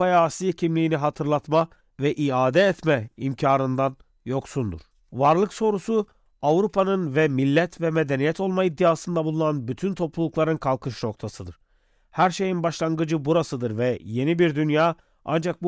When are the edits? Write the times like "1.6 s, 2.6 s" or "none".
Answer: none